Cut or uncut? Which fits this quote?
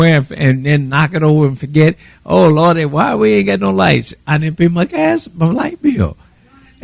uncut